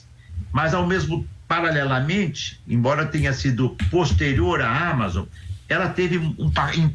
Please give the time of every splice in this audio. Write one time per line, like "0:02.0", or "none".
none